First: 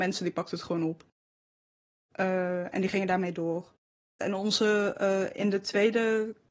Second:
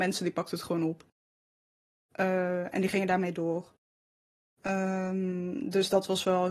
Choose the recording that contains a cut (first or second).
first